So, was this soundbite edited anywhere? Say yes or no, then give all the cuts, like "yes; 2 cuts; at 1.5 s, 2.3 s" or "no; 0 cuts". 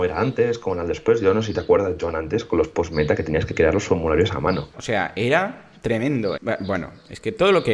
yes; 2 cuts; at 4.7 s, 6.4 s